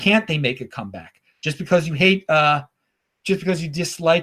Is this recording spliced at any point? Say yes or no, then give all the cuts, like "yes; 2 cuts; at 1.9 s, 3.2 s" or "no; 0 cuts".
no; 0 cuts